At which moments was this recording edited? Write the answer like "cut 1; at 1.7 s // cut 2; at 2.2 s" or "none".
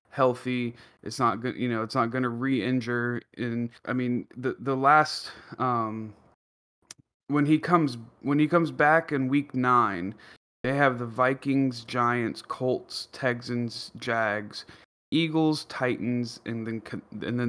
cut 1; at 3.8 s